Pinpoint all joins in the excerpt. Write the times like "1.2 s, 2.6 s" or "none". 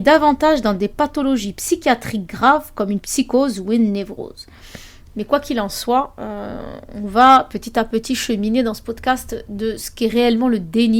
5.1 s